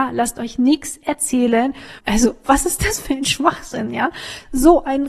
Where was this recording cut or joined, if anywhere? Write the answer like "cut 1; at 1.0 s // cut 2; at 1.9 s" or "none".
cut 1; at 2.0 s